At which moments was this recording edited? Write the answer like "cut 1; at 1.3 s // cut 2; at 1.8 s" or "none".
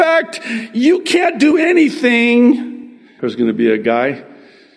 cut 1; at 3.2 s